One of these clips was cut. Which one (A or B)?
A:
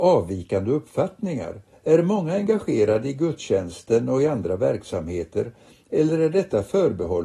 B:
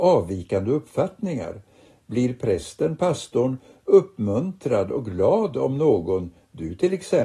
A